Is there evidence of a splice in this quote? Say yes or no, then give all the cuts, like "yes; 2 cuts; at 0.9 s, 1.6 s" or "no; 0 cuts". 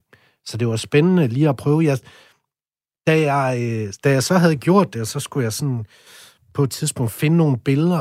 no; 0 cuts